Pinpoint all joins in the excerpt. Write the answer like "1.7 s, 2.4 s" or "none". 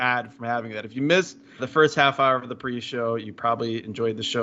1.6 s